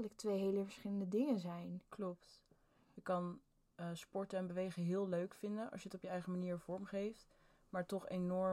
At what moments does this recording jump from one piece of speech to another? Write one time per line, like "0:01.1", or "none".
none